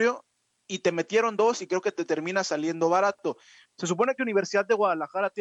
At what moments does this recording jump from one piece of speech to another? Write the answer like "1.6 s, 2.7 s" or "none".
3.6 s